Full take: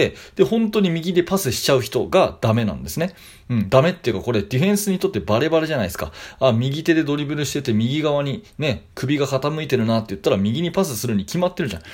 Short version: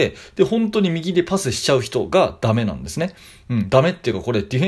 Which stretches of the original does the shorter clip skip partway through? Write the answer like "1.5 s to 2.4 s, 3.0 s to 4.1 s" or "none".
none

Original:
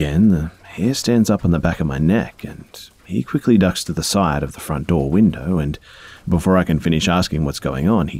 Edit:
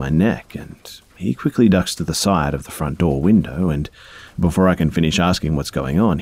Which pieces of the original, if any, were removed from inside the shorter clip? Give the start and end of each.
none

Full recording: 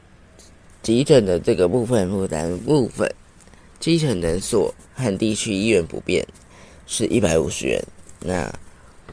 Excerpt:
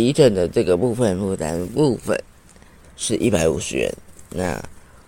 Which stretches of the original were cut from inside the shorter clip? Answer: 3.7 s to 6.7 s

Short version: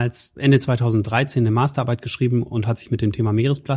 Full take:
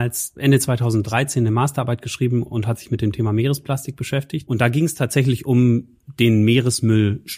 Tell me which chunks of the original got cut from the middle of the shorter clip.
none

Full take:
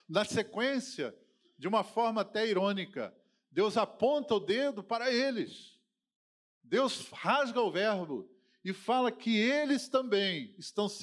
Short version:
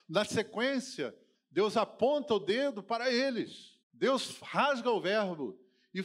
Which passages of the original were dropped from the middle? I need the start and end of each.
1.3 s to 3.3 s, 5.8 s to 6.5 s

